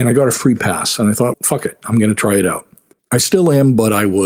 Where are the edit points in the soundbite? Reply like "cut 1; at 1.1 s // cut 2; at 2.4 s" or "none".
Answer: cut 1; at 1.3 s // cut 2; at 3.0 s